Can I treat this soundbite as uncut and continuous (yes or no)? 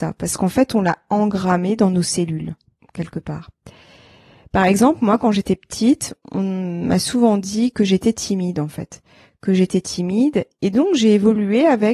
yes